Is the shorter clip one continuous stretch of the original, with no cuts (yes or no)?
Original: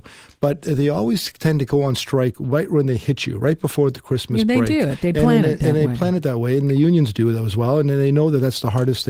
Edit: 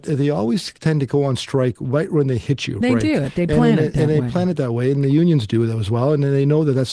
no